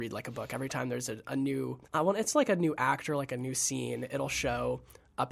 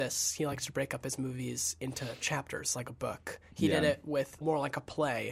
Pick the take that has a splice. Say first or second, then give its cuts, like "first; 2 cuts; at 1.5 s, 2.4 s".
second; 1 cut; at 4.4 s